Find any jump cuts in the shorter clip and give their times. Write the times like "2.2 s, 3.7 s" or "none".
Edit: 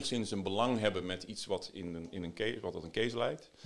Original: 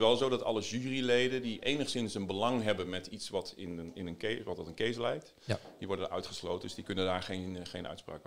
none